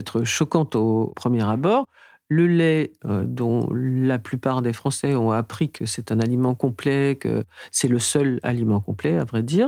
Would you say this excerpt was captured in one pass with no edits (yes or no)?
yes